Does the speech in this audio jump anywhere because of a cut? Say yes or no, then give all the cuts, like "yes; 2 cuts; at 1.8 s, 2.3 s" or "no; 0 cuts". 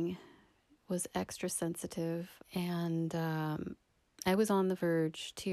yes; 1 cut; at 2.4 s